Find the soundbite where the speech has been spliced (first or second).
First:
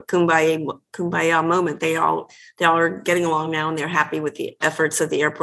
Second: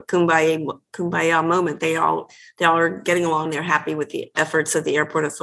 second